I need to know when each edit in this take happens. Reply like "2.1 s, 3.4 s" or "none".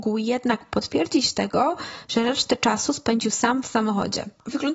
none